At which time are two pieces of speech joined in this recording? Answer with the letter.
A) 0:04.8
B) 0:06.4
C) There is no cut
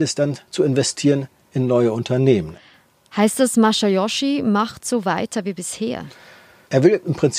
C